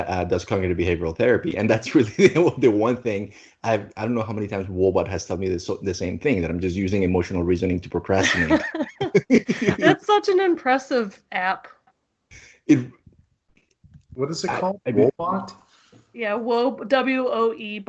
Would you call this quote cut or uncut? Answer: uncut